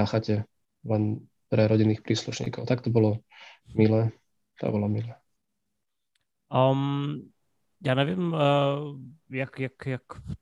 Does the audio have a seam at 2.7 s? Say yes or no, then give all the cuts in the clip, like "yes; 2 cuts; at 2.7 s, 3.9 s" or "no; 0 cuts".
no; 0 cuts